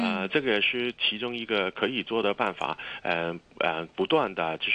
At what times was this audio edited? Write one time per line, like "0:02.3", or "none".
none